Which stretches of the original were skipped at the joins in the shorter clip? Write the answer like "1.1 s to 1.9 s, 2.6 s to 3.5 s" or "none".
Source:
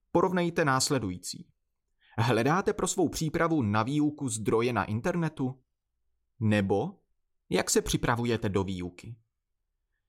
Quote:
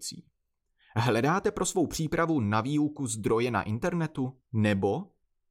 5.7 s to 6.3 s